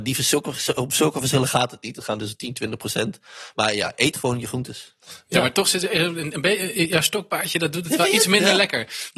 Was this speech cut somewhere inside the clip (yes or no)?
no